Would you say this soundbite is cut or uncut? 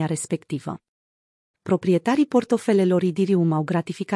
cut